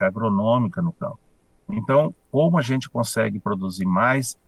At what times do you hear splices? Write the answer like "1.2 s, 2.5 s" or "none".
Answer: 1.6 s